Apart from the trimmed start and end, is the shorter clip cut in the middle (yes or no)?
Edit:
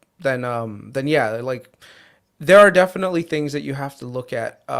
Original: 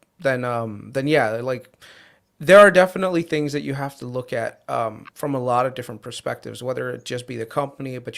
no